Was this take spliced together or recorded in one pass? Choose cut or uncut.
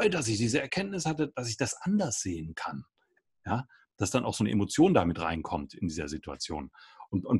uncut